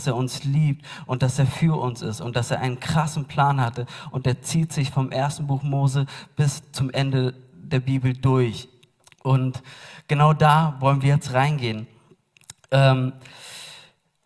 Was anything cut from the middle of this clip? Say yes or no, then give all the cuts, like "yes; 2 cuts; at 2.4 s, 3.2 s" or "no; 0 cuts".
no; 0 cuts